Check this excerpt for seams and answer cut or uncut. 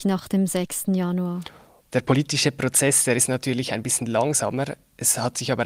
uncut